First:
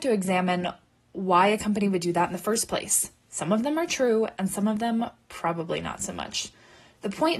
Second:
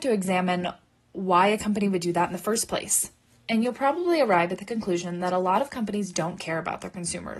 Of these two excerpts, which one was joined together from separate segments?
first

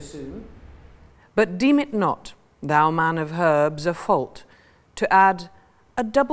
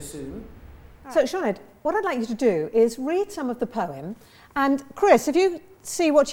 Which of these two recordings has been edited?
second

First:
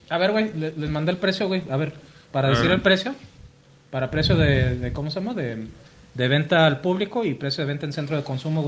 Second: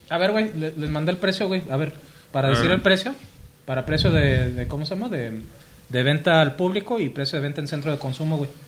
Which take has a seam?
second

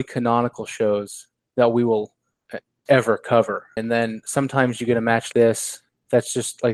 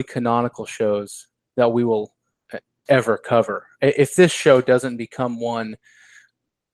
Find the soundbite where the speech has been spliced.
first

